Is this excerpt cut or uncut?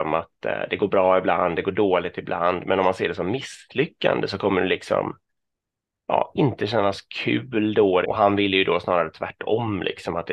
cut